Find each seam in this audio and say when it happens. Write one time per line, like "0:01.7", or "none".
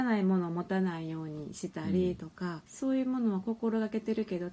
0:02.7